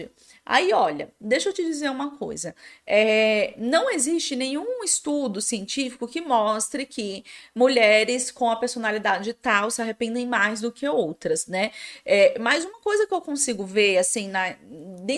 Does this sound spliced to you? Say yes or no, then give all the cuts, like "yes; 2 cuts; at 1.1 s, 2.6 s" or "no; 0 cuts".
no; 0 cuts